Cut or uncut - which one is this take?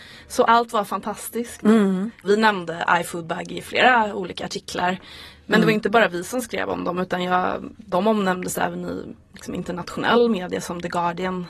uncut